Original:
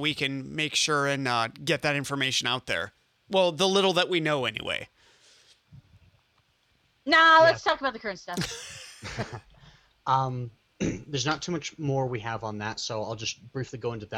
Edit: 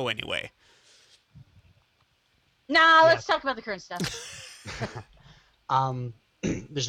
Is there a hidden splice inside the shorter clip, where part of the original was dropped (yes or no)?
no